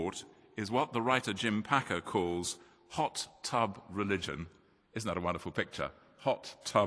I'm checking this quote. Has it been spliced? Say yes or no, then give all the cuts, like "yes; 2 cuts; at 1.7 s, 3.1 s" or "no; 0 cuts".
no; 0 cuts